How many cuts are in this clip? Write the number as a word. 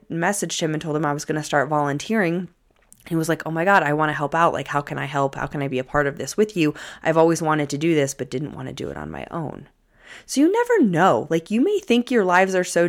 zero